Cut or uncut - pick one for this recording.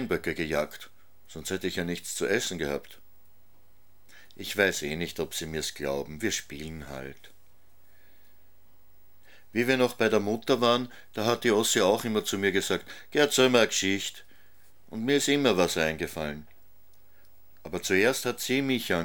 uncut